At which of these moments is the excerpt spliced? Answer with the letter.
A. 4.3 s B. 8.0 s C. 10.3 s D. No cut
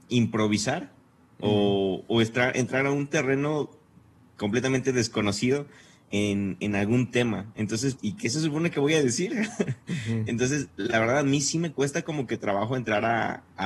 B